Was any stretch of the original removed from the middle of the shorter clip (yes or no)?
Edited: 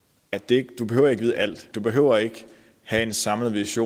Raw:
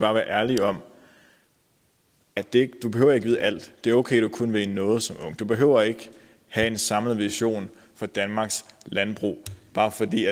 yes